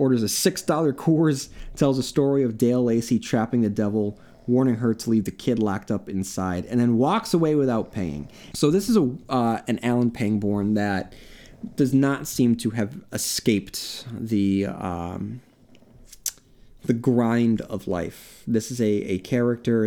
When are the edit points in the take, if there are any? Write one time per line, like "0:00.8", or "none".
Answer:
0:08.5